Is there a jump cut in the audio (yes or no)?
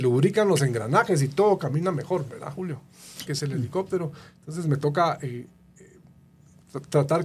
yes